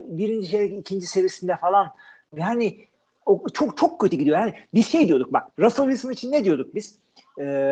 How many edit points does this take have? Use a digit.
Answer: 2